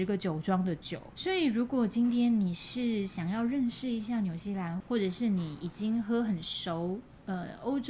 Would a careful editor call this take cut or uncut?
cut